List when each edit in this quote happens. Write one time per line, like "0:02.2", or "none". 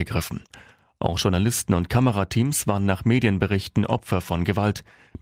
none

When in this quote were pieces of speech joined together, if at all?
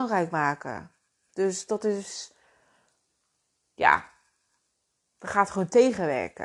0:01.3

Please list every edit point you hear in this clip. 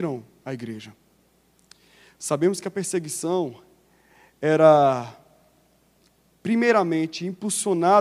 none

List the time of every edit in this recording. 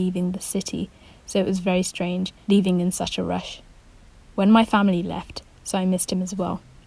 0:05.5

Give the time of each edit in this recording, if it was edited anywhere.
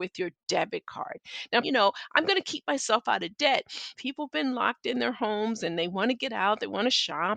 0:01.6
0:04.0

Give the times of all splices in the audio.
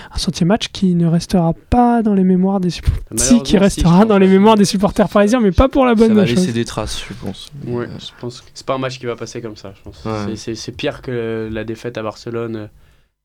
0:08.4

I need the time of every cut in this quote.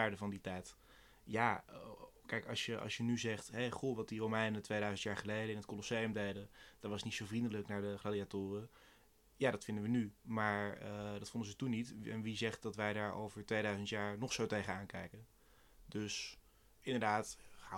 none

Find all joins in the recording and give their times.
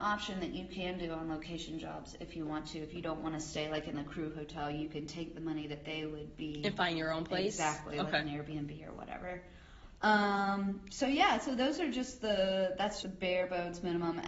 0:13.0

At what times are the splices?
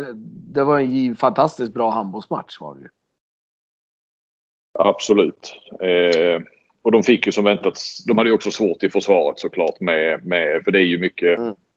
none

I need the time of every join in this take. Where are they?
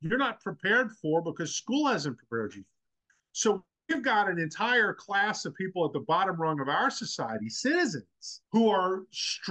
0:08.5

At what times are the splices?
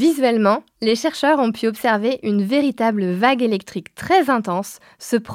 none

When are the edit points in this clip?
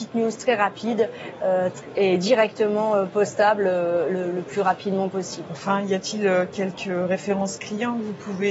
0:05.5

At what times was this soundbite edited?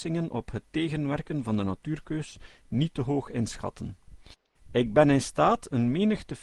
0:04.5

